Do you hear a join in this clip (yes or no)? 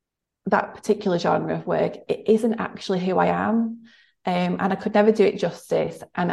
no